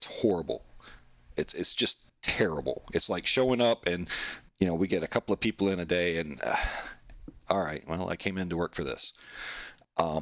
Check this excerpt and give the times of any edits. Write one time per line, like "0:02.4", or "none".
none

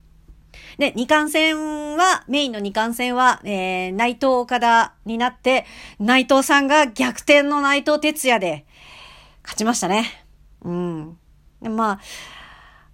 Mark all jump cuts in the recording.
none

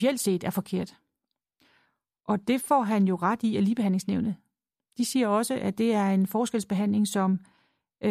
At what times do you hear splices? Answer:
none

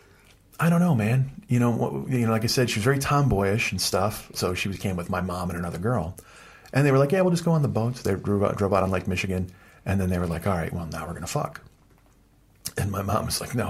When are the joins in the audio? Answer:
0:04.3

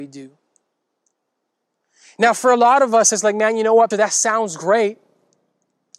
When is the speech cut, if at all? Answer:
0:03.9

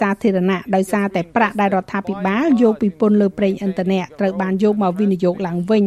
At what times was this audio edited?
none

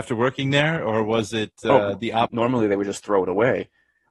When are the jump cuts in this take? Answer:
0:02.3

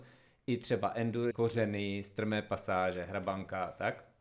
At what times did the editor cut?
0:01.3

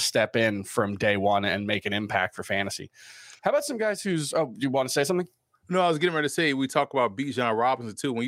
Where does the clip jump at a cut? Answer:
none

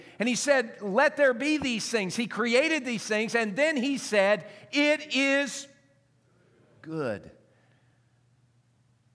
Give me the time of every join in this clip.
none

